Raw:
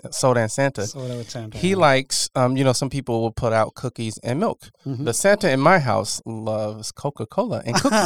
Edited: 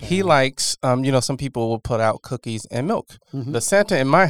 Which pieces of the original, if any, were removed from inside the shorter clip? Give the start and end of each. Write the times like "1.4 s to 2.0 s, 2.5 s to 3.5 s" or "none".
none